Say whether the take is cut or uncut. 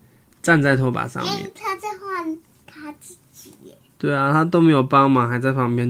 uncut